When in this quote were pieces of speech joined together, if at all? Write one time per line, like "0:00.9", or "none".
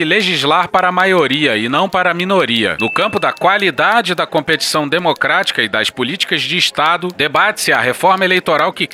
0:02.8